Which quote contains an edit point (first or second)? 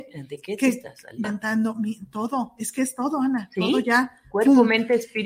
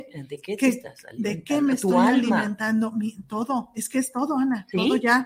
first